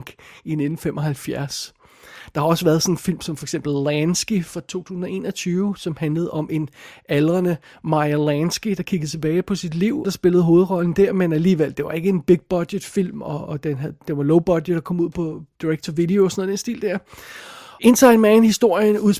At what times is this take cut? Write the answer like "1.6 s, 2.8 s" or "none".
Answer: 10.0 s, 17.8 s